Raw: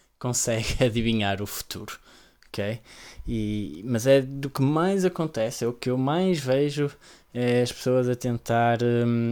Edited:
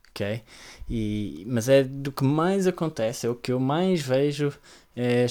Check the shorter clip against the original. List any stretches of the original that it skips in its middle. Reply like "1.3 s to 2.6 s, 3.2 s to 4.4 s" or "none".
none

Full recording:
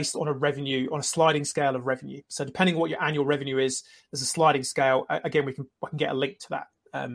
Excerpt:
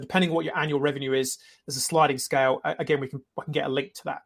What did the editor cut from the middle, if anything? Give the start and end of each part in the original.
none

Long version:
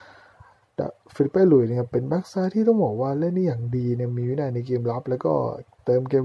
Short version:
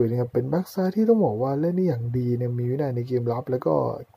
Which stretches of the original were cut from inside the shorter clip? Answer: none

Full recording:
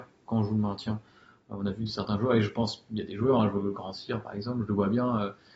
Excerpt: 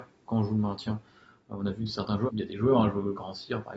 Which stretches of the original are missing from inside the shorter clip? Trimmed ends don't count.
2.3 s to 2.9 s

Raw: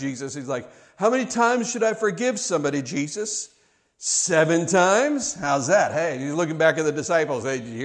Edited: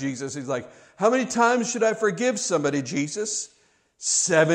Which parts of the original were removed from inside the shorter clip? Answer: none

